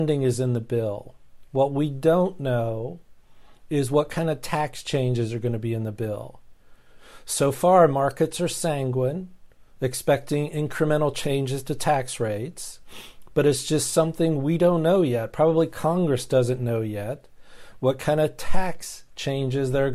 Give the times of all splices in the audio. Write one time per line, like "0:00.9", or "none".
none